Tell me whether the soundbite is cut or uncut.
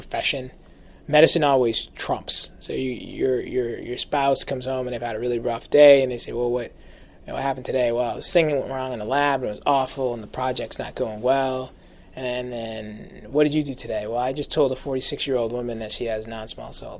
uncut